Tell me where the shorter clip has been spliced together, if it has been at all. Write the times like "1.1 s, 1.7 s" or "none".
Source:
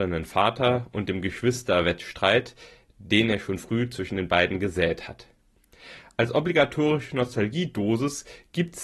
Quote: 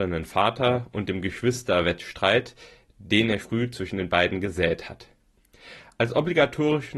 3.4 s